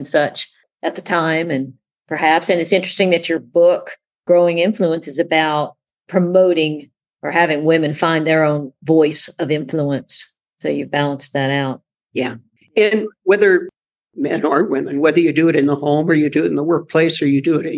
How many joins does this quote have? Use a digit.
0